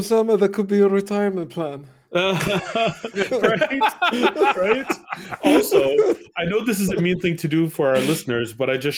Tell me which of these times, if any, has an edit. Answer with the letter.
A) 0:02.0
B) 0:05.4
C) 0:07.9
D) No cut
D